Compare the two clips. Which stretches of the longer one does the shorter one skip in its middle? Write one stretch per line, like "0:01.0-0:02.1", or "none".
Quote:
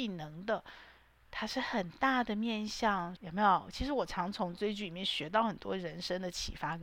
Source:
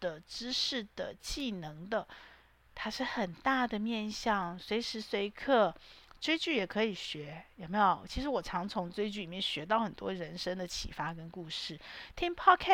0:04.6-0:07.5